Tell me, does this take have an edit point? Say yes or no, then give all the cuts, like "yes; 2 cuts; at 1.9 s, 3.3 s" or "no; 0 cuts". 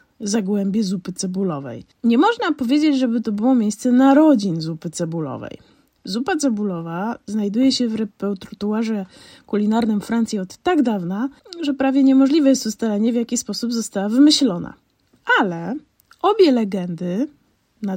no; 0 cuts